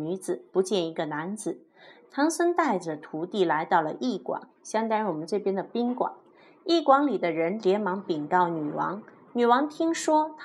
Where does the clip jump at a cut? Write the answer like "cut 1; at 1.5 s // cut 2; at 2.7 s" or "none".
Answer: none